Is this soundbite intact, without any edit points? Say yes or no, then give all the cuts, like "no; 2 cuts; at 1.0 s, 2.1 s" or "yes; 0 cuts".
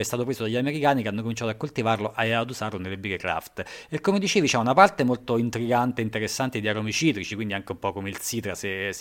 yes; 0 cuts